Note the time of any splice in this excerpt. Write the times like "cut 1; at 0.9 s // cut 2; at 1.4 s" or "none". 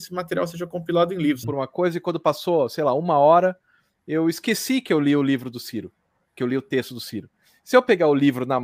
cut 1; at 1.4 s